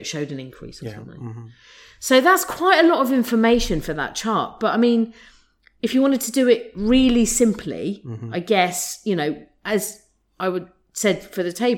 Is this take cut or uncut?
uncut